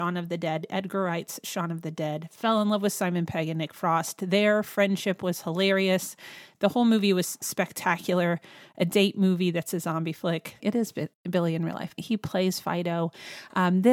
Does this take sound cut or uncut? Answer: cut